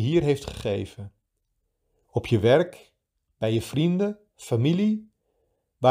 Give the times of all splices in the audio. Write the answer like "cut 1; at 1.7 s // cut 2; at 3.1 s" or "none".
none

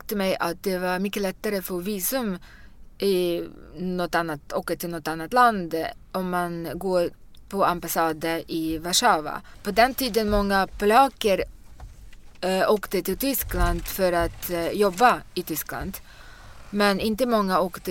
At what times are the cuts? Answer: none

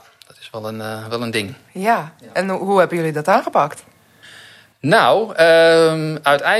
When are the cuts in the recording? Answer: none

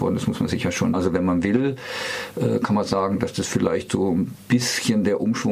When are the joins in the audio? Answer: cut 1; at 0.9 s

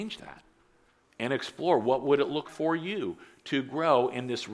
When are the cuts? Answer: cut 1; at 2.4 s

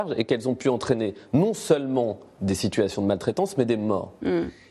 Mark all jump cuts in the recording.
none

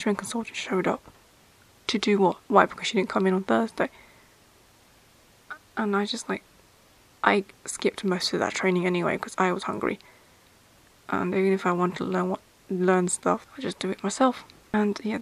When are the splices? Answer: cut 1; at 13.5 s

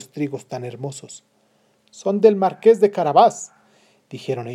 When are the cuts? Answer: none

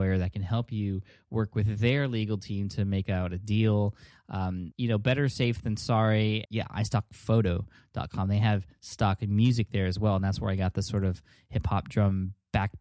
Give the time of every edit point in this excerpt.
cut 1; at 4.7 s // cut 2; at 6.5 s

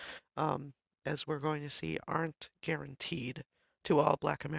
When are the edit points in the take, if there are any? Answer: cut 1; at 1.0 s

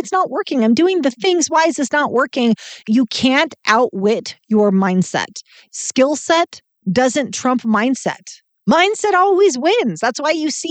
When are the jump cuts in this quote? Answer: cut 1; at 2.8 s

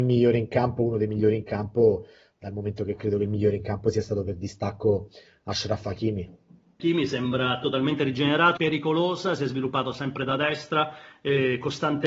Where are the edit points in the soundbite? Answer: cut 1; at 6.8 s // cut 2; at 8.6 s

